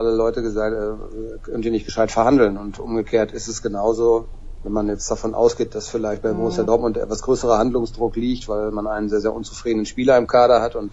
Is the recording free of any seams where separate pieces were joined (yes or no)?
yes